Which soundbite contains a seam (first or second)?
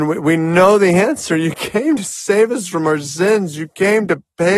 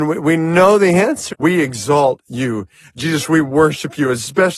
second